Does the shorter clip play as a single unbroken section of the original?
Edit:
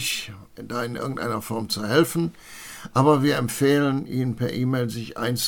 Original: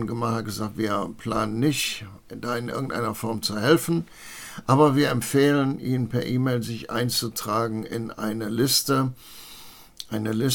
yes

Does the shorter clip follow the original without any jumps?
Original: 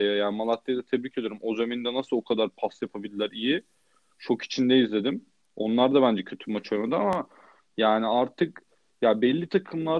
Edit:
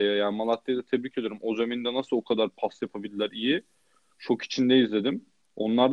yes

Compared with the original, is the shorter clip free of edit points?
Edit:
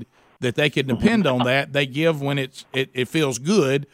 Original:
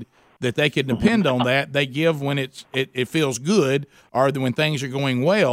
yes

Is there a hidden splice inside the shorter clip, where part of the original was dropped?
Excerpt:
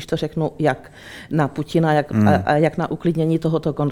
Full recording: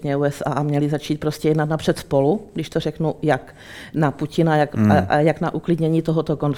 no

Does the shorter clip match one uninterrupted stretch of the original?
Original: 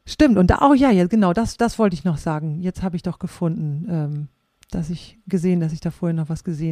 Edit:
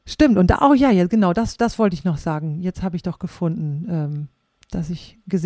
yes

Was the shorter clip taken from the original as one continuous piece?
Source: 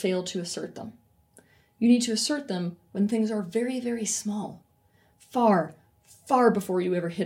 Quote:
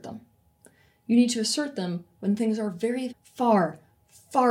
no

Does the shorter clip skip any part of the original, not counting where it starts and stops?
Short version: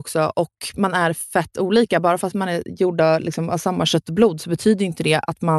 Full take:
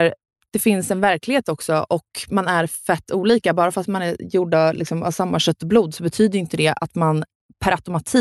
no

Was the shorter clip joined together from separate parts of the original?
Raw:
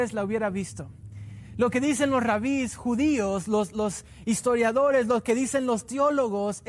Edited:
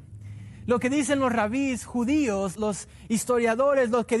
yes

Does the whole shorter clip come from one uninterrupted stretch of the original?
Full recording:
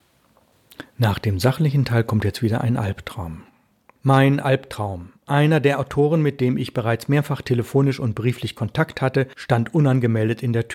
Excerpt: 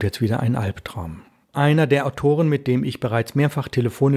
no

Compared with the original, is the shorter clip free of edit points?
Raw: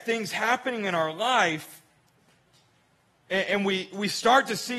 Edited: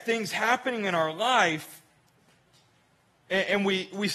yes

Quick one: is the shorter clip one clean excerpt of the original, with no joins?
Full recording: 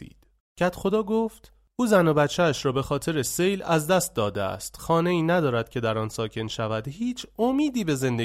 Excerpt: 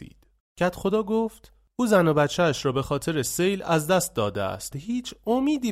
no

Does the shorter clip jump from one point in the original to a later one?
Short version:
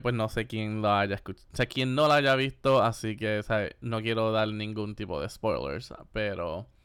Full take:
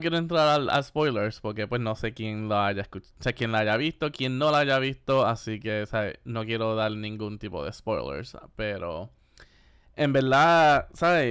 yes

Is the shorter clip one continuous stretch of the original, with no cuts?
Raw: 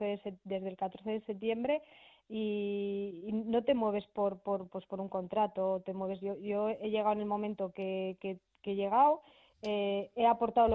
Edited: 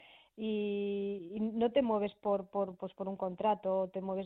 yes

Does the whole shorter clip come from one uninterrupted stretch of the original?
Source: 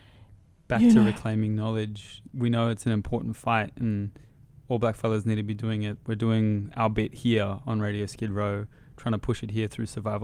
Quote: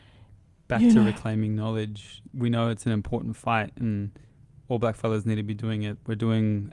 yes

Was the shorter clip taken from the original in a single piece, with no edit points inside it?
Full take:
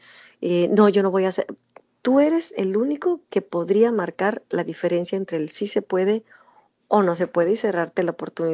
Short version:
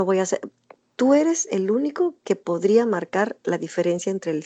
yes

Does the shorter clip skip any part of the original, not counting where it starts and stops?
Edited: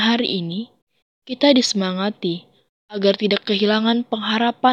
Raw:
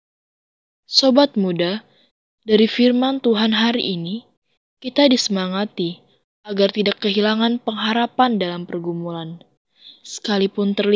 no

